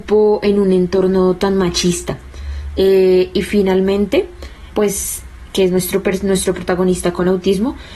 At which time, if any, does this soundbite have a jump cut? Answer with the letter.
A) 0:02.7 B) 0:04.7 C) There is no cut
B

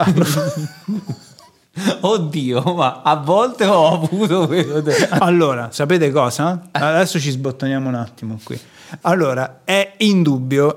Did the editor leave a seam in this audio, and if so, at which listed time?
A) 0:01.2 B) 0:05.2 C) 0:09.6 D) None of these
B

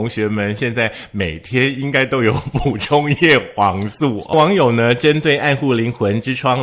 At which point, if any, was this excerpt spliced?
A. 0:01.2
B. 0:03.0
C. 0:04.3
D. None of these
C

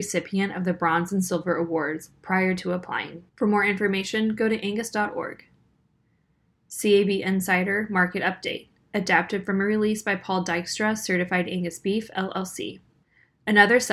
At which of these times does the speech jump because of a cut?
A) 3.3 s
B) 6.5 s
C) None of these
A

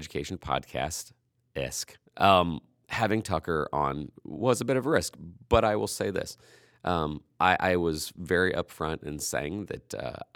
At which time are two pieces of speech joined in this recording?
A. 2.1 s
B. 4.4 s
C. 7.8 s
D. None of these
A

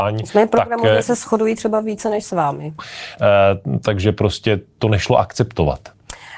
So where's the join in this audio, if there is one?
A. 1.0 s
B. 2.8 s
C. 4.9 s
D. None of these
B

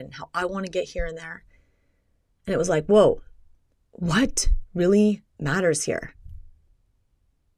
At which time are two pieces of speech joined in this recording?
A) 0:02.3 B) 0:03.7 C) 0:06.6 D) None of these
B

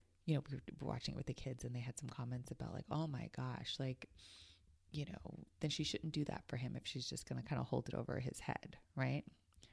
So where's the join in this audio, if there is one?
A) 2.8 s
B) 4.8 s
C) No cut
C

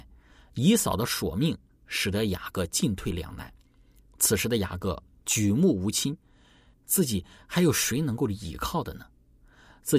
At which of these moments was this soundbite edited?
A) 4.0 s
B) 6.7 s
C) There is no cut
B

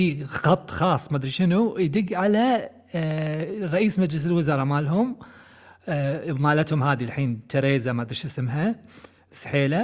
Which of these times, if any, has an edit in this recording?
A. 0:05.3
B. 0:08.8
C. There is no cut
C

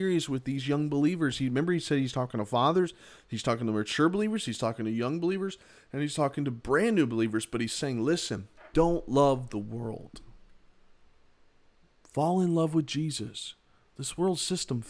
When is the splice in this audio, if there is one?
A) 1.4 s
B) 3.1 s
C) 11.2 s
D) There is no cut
D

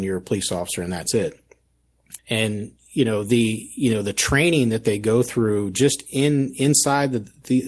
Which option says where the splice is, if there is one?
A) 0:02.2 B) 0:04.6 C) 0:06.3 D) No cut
A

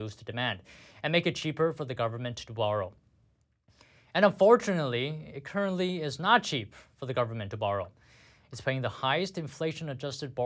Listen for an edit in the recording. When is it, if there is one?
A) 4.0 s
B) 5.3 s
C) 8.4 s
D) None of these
D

